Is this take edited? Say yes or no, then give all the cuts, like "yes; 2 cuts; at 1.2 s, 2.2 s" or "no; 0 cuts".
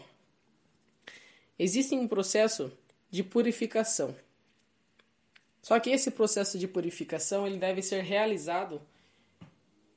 no; 0 cuts